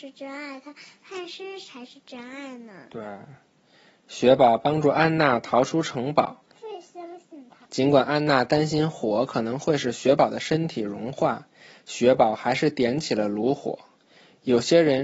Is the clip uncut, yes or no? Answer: no